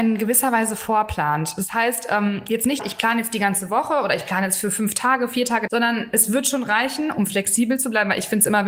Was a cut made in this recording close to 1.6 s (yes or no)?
no